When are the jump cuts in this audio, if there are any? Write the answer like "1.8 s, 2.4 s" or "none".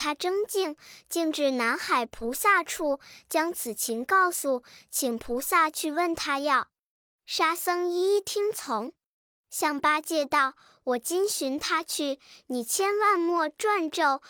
none